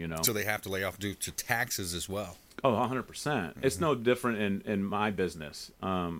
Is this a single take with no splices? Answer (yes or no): yes